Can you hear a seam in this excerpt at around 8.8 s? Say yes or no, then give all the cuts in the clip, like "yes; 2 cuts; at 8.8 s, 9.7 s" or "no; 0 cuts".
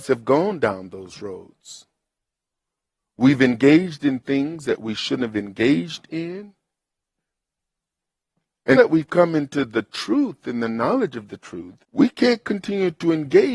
yes; 3 cuts; at 3.0 s, 8.8 s, 11.8 s